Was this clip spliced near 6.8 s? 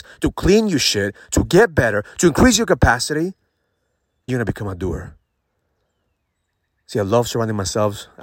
no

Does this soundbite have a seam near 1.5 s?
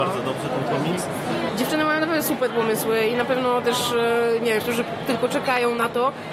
yes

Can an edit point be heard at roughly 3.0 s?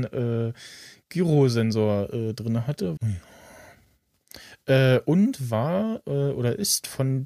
yes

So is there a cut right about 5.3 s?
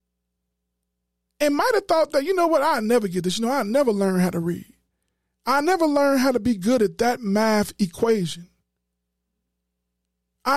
yes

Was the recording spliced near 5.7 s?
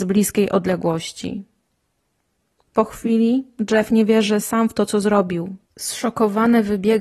yes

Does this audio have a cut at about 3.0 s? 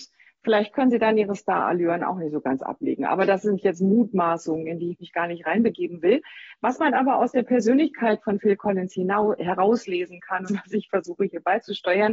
no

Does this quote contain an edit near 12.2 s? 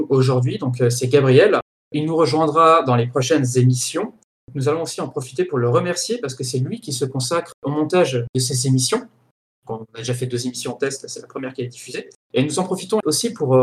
yes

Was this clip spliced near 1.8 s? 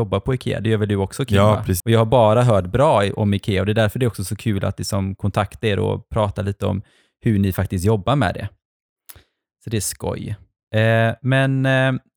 yes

